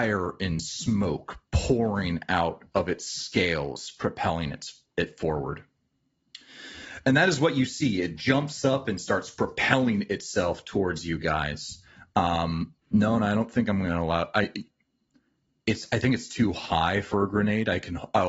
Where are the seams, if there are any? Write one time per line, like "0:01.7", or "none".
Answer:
0:12.8